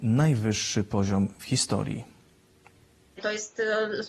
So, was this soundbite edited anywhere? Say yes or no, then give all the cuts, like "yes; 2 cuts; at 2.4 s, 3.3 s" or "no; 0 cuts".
no; 0 cuts